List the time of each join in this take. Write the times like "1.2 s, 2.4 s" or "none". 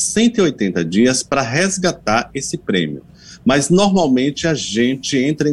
none